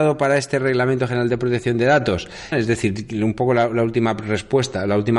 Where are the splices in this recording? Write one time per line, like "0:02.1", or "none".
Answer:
0:02.5